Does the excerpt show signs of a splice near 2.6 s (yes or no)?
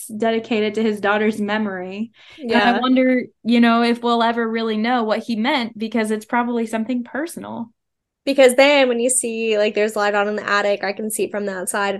no